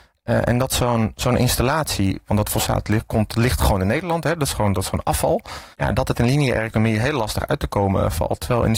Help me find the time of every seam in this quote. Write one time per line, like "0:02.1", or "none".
0:05.7